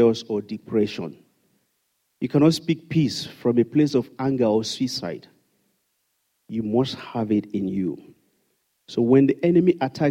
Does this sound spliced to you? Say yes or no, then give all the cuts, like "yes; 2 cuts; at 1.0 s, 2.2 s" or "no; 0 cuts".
no; 0 cuts